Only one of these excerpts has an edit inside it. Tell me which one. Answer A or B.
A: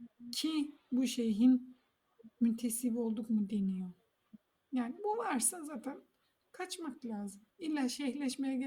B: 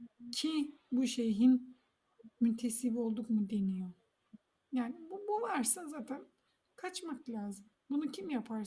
A